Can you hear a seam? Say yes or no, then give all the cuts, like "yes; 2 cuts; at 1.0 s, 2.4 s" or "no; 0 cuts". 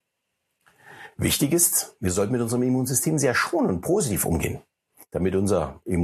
no; 0 cuts